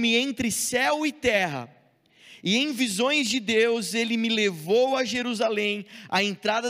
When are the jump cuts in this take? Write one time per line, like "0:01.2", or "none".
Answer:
none